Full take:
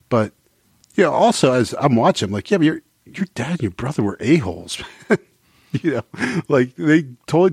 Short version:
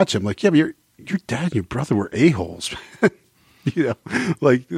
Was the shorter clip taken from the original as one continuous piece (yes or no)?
yes